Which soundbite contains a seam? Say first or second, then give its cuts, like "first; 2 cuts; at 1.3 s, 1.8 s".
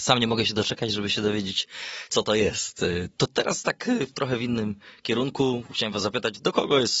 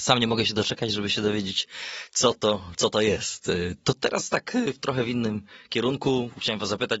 first; 1 cut; at 2.1 s